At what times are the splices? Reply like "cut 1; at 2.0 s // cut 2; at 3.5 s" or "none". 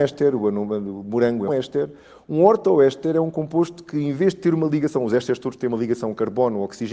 cut 1; at 1.5 s